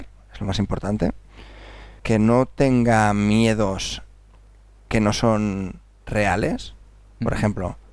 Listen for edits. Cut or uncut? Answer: uncut